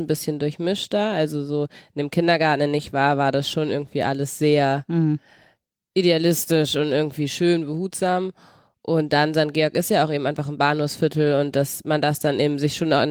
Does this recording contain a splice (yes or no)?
no